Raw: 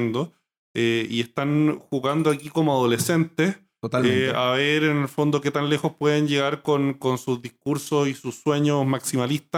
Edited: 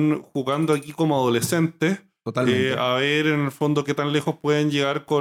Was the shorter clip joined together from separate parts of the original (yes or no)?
no